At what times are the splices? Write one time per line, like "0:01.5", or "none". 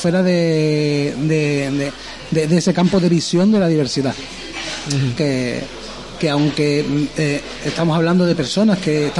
0:05.2
0:06.2